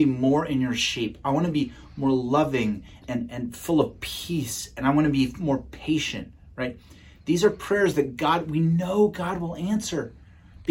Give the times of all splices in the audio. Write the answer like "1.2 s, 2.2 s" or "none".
3.0 s